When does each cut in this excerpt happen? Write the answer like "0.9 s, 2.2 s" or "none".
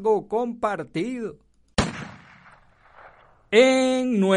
none